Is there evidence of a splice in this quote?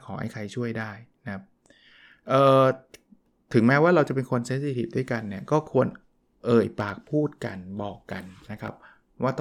no; 0 cuts

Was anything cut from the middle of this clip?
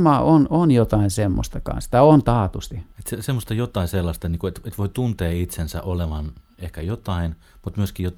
no; 0 cuts

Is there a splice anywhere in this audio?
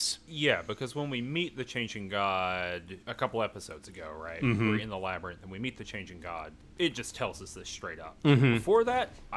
yes; 1 cut; at 3.0 s

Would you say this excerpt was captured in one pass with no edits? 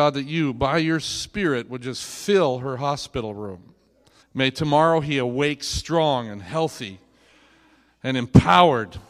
no; 1 cut; at 4.2 s

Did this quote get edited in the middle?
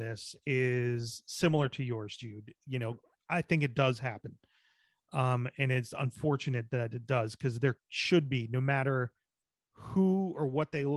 no; 0 cuts

